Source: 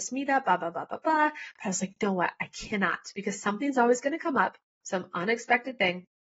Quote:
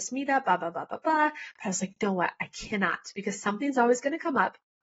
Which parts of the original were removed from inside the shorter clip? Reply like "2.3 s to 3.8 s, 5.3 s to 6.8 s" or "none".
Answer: none